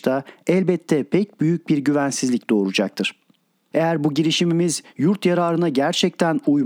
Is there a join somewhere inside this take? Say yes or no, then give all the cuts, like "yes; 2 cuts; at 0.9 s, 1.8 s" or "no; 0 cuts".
yes; 1 cut; at 3.7 s